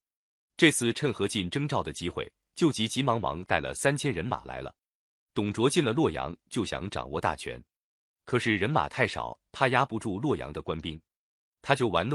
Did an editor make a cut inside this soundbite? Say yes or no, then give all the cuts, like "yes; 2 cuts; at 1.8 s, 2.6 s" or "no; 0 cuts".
no; 0 cuts